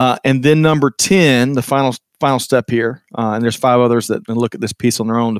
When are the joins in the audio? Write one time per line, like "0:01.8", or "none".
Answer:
0:04.2